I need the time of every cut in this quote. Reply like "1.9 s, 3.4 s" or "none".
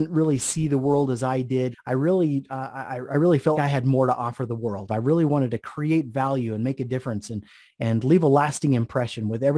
1.7 s, 3.5 s, 4.9 s